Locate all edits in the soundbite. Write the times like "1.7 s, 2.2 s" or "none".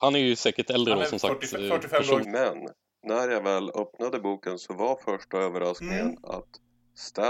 2.2 s